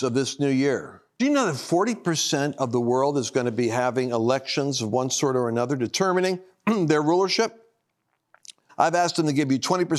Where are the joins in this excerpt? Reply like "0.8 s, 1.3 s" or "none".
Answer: 1.2 s, 8.7 s